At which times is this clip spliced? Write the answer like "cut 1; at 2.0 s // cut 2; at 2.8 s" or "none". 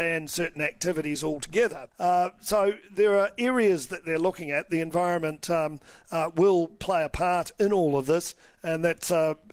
cut 1; at 1.9 s